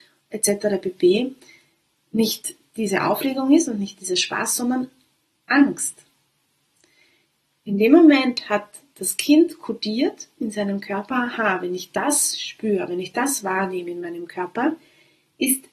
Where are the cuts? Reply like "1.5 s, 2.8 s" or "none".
none

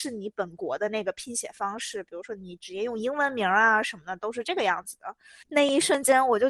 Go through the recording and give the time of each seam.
5.4 s

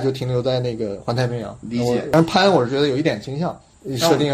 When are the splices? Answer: 1.6 s

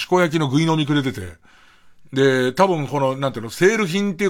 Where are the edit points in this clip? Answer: none

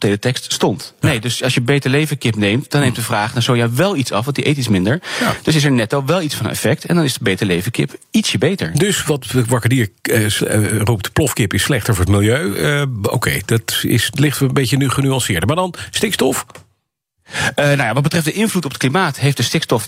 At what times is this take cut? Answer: 1.0 s

